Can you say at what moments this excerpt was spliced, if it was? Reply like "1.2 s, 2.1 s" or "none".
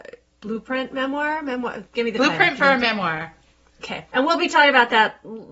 4.1 s